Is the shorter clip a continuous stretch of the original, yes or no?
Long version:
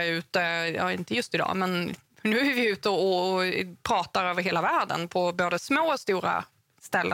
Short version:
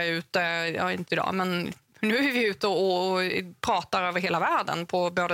no